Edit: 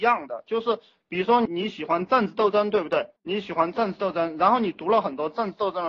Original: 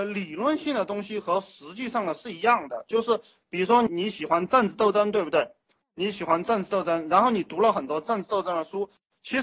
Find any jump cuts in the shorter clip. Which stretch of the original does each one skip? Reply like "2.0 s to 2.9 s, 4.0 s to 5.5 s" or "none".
5.6 s to 5.9 s

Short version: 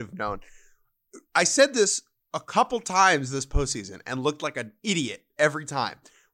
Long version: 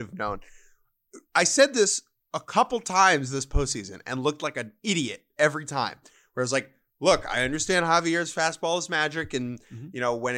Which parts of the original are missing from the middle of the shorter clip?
none

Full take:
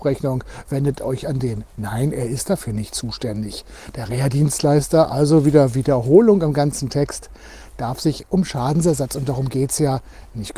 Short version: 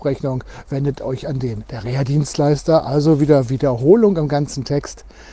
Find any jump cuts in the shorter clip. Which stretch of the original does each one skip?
1.7 s to 3.9 s

